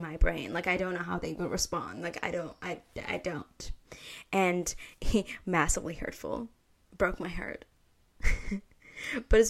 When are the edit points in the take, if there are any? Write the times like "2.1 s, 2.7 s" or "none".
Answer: none